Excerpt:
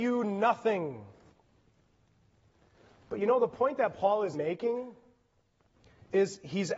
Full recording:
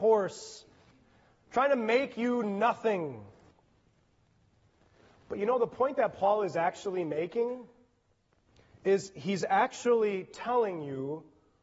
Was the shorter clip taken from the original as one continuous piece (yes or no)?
no